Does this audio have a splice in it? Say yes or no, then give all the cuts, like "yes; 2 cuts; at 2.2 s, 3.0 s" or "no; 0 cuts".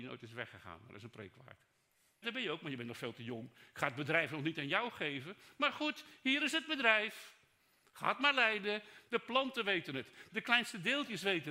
yes; 3 cuts; at 2.2 s, 9.1 s, 10.3 s